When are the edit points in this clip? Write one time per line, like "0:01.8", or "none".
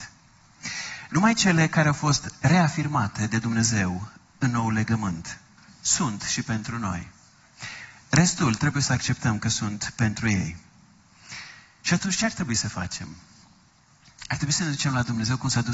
none